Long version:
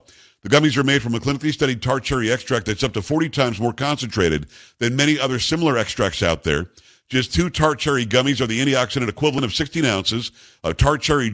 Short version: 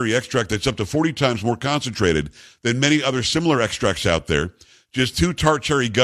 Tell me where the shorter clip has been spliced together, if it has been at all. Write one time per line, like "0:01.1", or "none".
none